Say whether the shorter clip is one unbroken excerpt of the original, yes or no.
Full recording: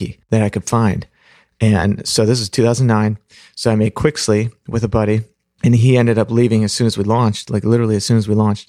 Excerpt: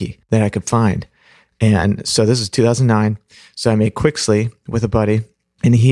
yes